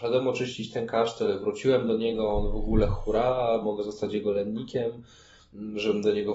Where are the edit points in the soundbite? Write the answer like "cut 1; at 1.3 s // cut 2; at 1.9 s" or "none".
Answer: cut 1; at 3.6 s